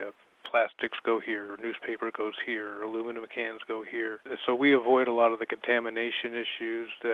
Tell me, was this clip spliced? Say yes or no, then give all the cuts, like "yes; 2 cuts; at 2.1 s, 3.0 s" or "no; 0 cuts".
no; 0 cuts